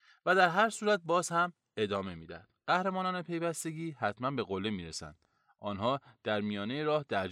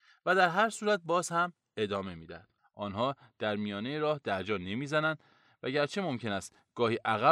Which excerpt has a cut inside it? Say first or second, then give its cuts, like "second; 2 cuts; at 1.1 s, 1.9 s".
second; 1 cut; at 2.6 s